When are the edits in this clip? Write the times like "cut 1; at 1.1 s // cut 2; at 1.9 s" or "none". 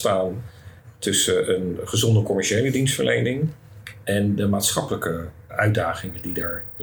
cut 1; at 5.5 s